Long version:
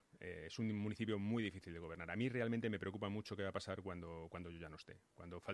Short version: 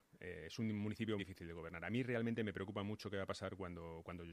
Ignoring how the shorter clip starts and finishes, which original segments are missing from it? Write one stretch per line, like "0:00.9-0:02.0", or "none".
0:01.2-0:01.4